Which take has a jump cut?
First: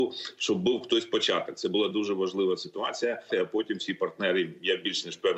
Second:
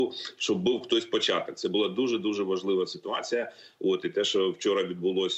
first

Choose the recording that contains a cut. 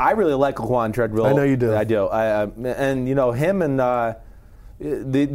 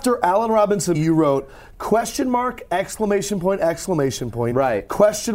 second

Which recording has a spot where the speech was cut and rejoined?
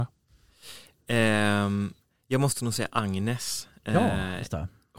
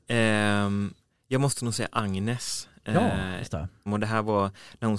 second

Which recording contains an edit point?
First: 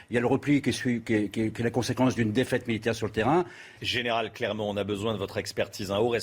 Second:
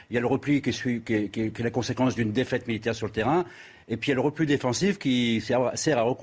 first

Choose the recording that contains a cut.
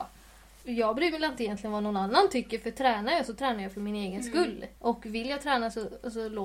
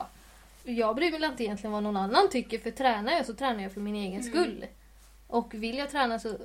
first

